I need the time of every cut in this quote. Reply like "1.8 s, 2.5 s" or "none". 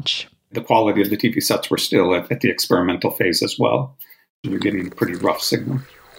4.4 s